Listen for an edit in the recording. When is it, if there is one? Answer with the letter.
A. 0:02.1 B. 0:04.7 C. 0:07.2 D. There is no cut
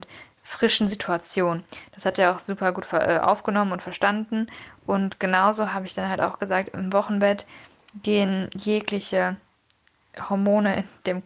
D